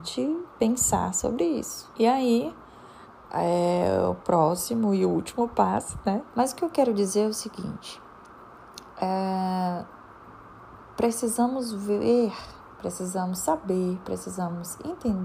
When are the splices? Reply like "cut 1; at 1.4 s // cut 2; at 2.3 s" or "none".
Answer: cut 1; at 1.9 s // cut 2; at 6.3 s